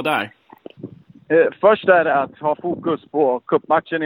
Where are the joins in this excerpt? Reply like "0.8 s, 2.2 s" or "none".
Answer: none

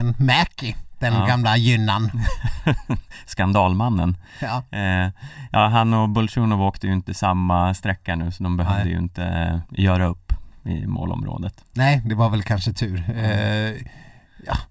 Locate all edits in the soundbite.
9.7 s

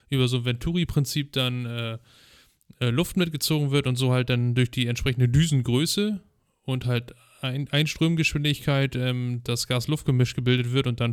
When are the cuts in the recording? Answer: none

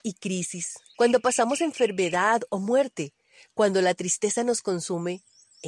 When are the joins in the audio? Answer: 0.9 s

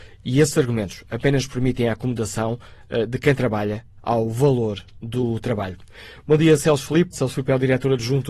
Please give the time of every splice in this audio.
7.1 s

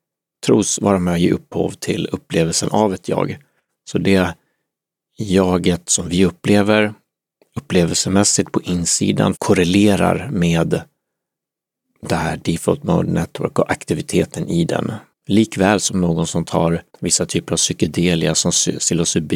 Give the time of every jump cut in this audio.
9.4 s, 15.1 s, 16.9 s

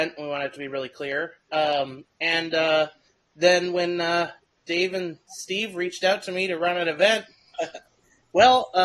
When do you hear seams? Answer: 2.0 s, 7.5 s

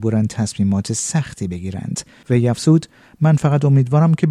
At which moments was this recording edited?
2.2 s

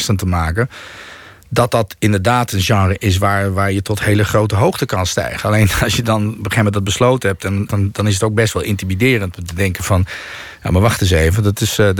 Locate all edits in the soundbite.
7.7 s

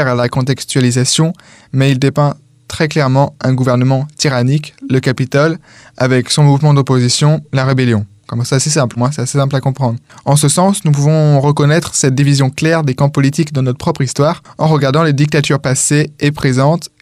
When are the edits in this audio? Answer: 9.0 s

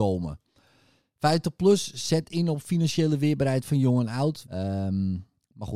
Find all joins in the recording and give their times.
4.4 s

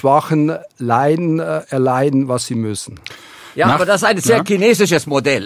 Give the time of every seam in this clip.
none

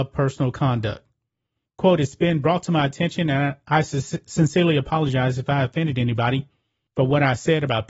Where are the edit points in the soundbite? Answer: 1.7 s, 6.9 s

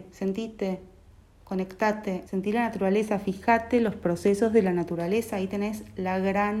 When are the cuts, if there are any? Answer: 2.3 s

